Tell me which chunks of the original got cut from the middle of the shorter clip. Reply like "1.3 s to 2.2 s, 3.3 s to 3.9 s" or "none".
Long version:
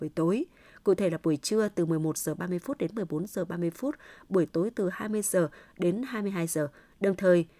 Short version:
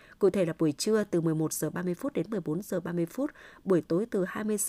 none